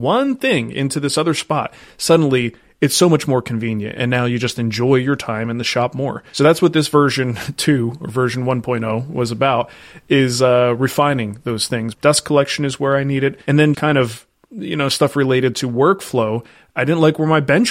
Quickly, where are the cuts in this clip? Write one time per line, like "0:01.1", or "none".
0:11.9
0:13.7